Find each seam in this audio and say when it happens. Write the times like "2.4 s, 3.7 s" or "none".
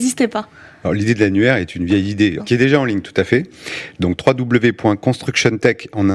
2.4 s